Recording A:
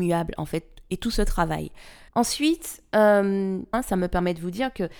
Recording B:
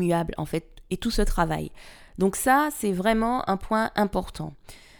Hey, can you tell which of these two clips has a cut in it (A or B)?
A